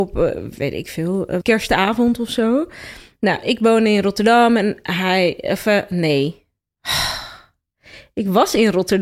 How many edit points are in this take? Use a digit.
1